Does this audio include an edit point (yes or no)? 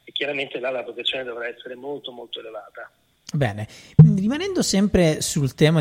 no